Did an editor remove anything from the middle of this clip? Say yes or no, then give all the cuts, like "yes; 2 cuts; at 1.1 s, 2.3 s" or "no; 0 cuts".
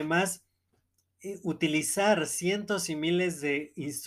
no; 0 cuts